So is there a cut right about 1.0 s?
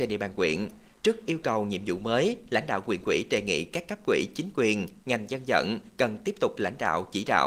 no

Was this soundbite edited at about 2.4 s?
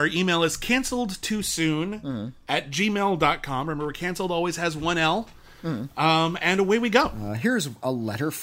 no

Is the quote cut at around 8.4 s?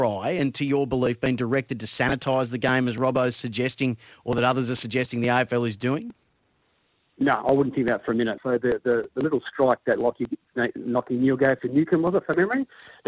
yes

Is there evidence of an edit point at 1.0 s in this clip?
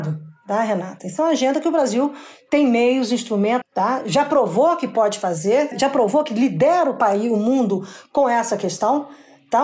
no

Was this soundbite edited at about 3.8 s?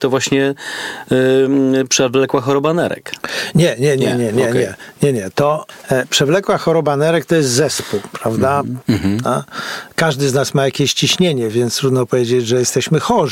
no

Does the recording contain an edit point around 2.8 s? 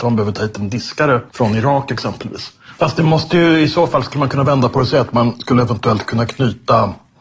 yes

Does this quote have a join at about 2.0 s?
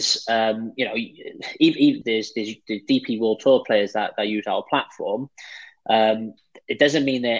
yes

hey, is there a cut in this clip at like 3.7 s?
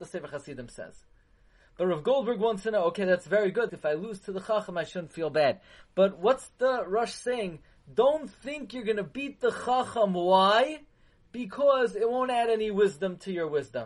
yes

